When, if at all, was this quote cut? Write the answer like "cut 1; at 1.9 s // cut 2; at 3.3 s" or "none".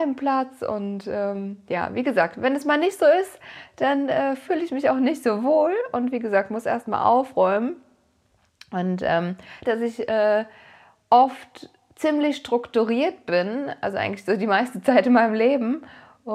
cut 1; at 9.6 s